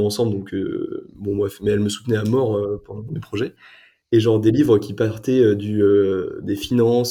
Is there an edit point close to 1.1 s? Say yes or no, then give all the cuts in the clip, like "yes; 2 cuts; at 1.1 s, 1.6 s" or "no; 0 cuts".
no; 1 cut; at 4.0 s